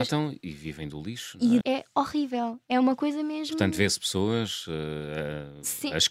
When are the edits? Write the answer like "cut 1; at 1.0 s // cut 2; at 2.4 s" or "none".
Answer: cut 1; at 1.6 s